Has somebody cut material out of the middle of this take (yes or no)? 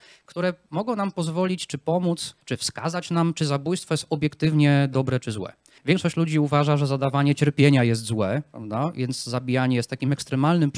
yes